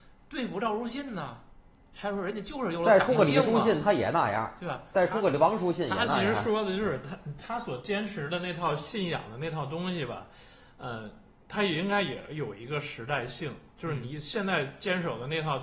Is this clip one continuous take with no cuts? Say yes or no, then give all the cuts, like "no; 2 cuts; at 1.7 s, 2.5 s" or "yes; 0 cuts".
yes; 0 cuts